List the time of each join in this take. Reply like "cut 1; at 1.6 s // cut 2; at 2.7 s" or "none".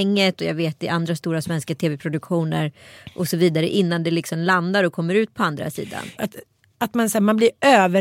cut 1; at 6.2 s